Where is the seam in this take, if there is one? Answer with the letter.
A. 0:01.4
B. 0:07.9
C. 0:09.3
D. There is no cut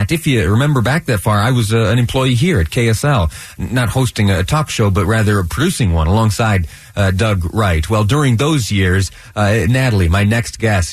D